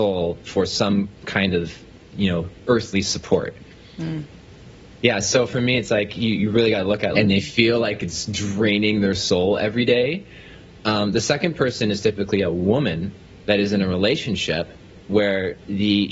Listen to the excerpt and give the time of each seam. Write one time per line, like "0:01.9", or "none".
0:07.1